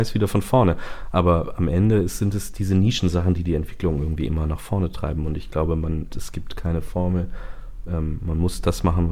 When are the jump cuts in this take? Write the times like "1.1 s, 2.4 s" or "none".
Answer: 6.1 s